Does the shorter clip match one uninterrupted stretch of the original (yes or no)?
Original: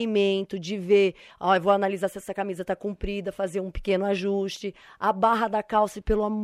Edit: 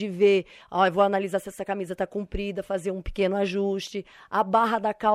yes